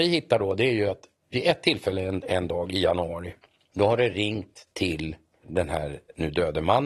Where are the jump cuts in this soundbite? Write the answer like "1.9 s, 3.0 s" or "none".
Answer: none